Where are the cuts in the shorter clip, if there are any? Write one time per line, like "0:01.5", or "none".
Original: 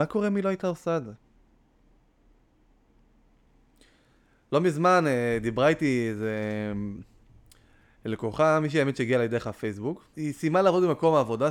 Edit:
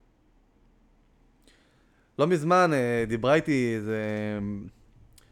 none